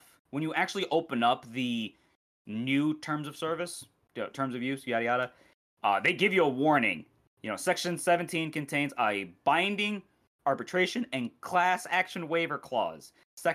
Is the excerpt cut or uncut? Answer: uncut